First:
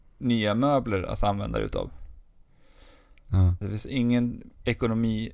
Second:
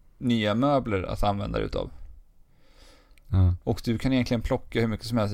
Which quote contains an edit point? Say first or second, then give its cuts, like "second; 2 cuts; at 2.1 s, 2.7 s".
first; 1 cut; at 3.6 s